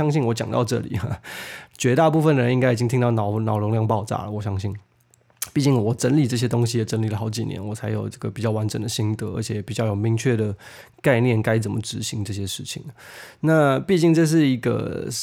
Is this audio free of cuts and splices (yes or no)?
yes